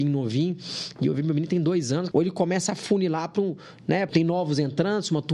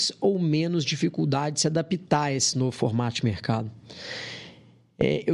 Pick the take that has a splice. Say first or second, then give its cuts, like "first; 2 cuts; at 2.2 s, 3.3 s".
first; 2 cuts; at 2.1 s, 4.1 s